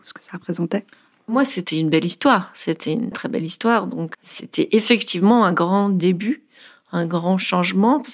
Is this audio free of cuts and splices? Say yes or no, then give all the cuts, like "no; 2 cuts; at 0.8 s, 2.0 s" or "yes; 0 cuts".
no; 2 cuts; at 3.1 s, 4.1 s